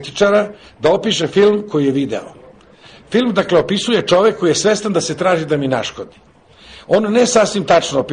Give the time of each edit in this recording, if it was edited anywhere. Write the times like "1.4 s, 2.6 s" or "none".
none